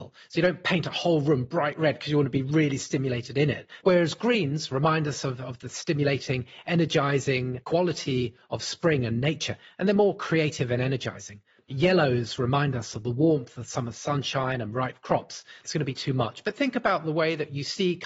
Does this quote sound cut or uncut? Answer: cut